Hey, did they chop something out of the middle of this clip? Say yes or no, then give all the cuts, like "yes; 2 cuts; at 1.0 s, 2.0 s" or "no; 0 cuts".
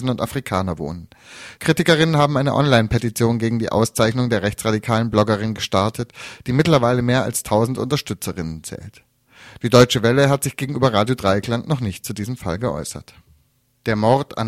yes; 1 cut; at 1.6 s